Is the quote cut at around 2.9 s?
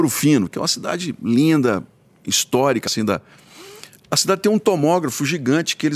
yes; 1 cut; at 2.9 s

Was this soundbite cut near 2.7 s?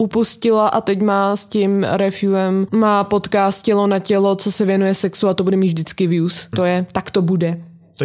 yes; 2 cuts; at 2.7 s, 6.5 s

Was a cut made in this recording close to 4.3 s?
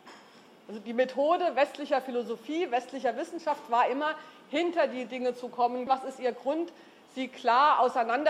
no; 1 cut; at 5.9 s

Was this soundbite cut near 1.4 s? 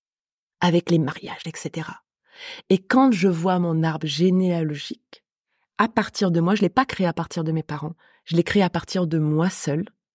yes; 1 cut; at 1.4 s

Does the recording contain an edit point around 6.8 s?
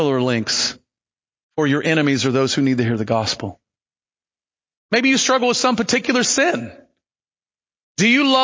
no; 0 cuts

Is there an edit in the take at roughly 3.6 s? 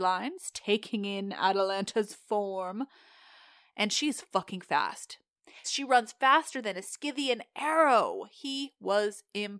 no; 1 cut; at 5.6 s

